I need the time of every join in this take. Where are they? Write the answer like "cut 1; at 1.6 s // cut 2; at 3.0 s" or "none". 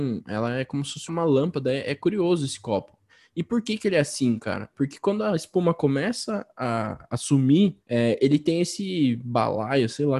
cut 1; at 1.1 s // cut 2; at 7.8 s